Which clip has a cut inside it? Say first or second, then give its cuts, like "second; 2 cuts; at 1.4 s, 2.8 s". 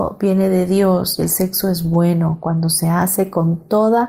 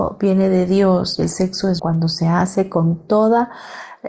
second; 1 cut; at 1.8 s